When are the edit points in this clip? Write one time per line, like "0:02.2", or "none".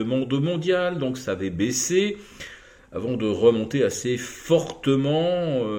none

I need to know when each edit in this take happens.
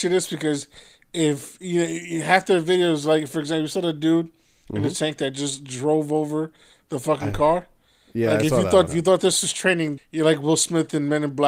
0:08.9
0:10.0

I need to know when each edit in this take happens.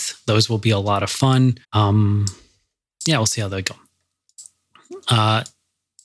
0:01.6

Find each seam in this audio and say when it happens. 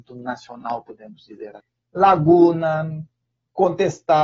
0:01.8

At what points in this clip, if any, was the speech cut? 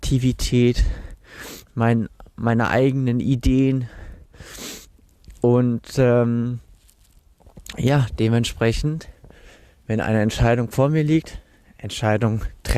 none

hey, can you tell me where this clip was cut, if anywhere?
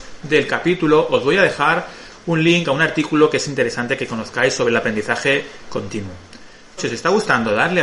0:06.8

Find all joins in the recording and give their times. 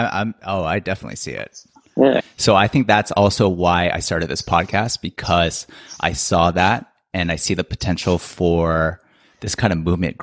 0:02.2

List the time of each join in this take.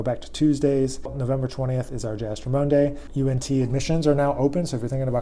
none

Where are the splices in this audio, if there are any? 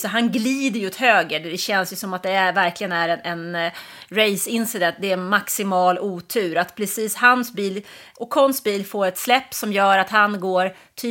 none

